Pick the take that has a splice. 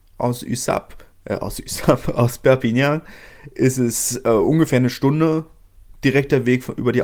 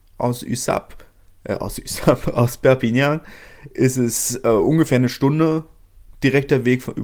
first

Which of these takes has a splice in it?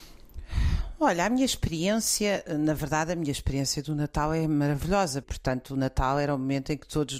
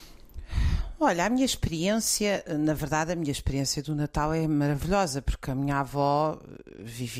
first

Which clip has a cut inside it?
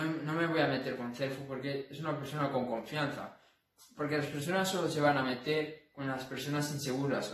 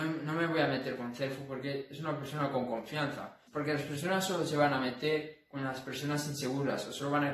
second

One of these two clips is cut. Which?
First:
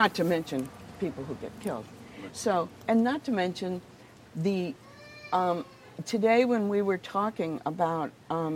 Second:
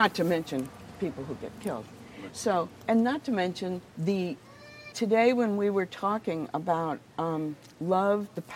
second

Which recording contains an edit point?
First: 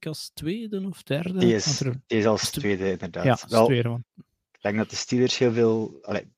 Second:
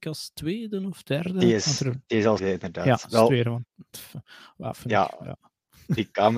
second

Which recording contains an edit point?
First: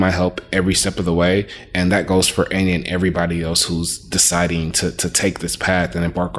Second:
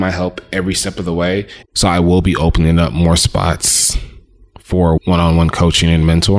second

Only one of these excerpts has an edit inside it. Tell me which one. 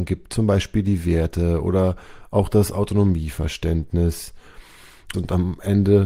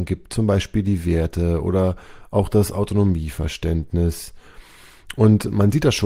first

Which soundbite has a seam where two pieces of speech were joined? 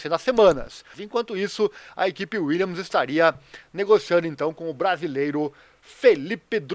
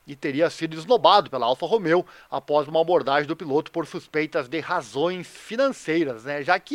first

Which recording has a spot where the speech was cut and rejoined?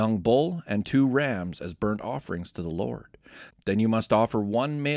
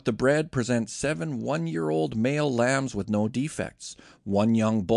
first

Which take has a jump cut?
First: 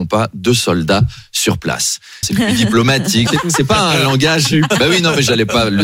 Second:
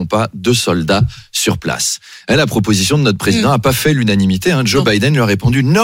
first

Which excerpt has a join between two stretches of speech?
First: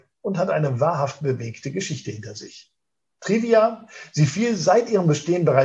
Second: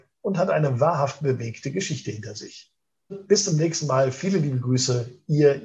second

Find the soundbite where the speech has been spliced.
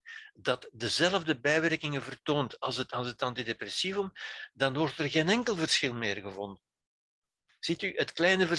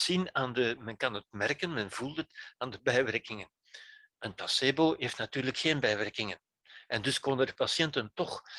first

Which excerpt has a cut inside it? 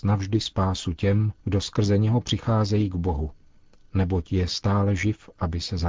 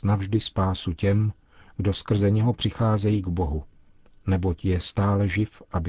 first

